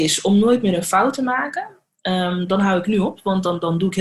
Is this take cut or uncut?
uncut